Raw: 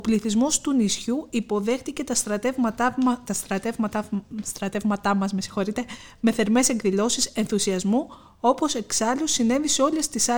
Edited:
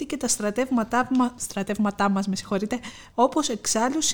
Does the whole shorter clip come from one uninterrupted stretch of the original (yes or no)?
no